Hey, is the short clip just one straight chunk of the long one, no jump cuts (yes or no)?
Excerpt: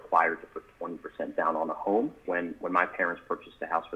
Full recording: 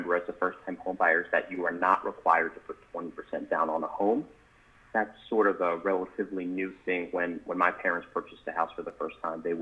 no